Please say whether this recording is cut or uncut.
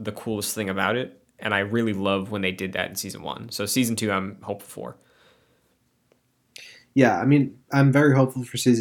uncut